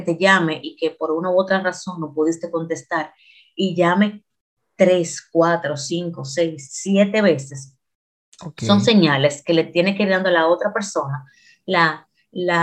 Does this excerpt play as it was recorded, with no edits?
yes; 0 cuts

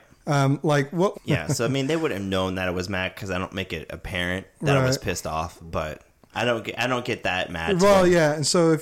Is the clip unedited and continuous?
no; 1 cut; at 1.1 s

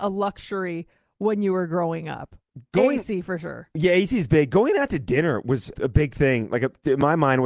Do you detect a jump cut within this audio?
yes; 1 cut; at 5.7 s

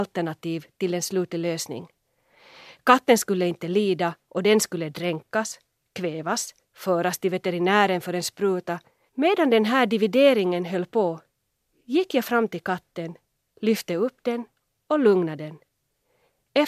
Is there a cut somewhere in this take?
yes; 1 cut; at 9.1 s

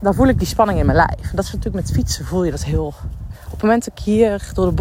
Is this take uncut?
no; 1 cut; at 3.3 s

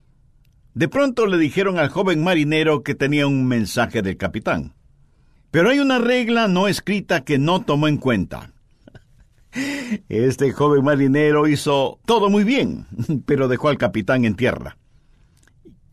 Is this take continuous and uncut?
no; 3 cuts; at 5.3 s, 8.8 s, 12.0 s

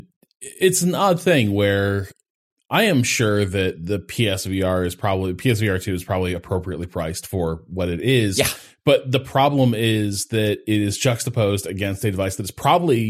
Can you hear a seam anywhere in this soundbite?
no; 0 cuts

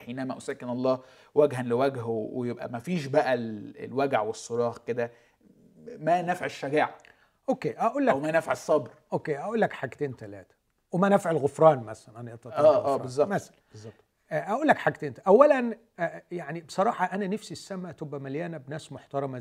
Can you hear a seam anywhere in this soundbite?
no; 0 cuts

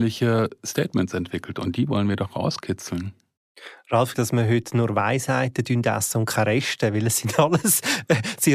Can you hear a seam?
yes; 1 cut; at 4.1 s

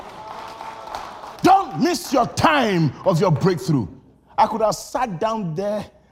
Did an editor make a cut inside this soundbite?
yes; 1 cut; at 1.4 s

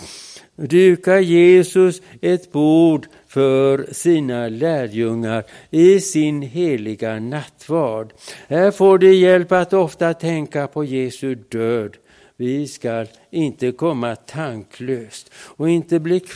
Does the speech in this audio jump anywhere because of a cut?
no; 0 cuts

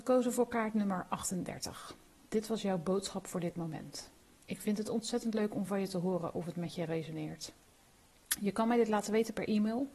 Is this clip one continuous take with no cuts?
yes; 0 cuts

